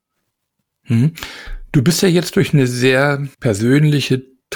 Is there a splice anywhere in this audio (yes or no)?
yes